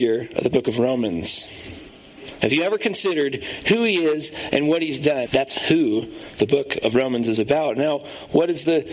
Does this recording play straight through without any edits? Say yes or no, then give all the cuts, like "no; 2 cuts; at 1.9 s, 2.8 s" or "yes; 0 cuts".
no; 2 cuts; at 2.4 s, 5.3 s